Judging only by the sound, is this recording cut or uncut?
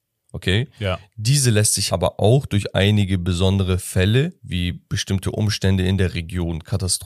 cut